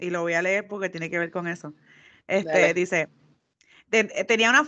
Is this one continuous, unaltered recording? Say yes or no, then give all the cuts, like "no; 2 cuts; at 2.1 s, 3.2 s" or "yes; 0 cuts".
yes; 0 cuts